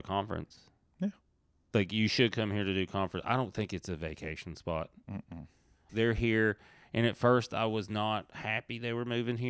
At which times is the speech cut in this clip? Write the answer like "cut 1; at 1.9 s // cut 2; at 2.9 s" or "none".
cut 1; at 5.9 s